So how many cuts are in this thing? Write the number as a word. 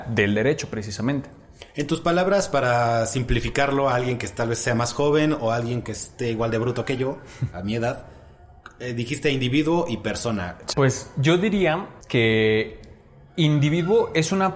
two